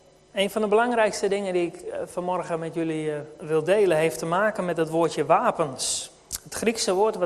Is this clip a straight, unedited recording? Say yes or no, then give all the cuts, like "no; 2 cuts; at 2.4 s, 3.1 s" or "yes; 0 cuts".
yes; 0 cuts